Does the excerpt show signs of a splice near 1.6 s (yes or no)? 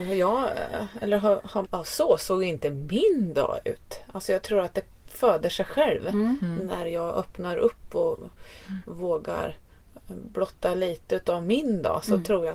yes